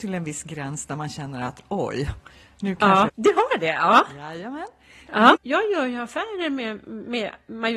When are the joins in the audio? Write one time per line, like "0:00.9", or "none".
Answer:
0:03.1
0:05.3

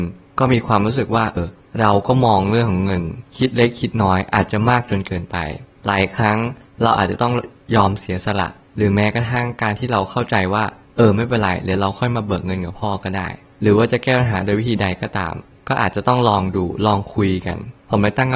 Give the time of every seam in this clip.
0:01.4

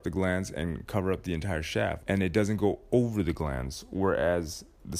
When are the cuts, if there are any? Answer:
0:02.0

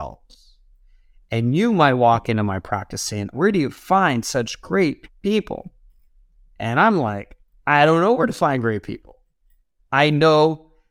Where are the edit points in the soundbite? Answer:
0:03.3

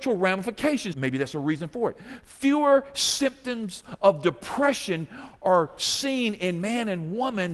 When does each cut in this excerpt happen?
0:00.9

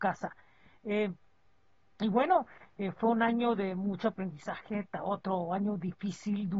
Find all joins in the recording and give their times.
none

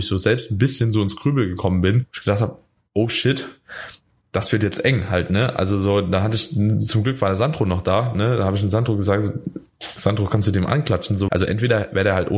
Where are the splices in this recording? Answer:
0:11.3

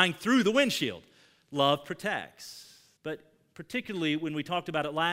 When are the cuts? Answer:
0:03.0

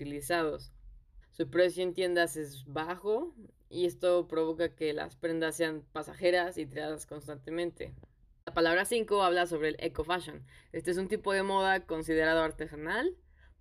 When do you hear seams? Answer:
0:01.2

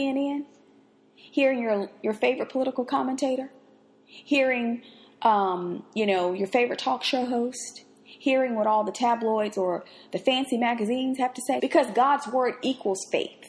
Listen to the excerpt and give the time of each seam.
0:11.6

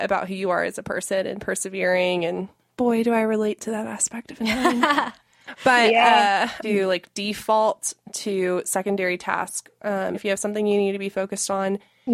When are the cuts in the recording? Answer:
0:06.6
0:10.1

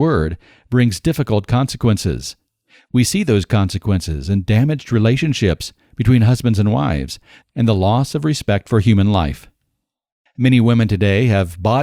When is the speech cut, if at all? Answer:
0:07.4

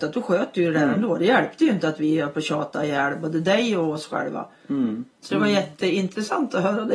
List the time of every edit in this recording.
0:05.2

